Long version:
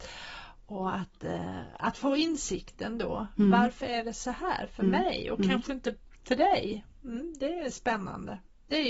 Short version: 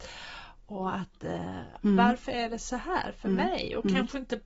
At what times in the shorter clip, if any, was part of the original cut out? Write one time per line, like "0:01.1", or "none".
0:01.8